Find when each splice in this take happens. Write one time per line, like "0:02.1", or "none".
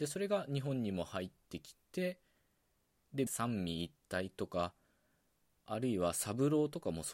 0:03.3

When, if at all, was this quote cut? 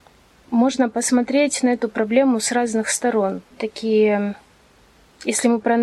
0:03.5

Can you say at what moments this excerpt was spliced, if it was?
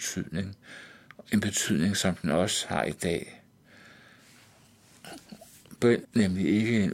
0:01.2
0:06.0

